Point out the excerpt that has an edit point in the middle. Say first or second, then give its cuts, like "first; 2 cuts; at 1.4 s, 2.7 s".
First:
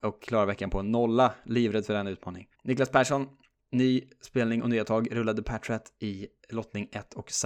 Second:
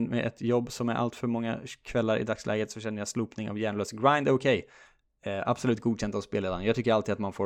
first; 1 cut; at 2.5 s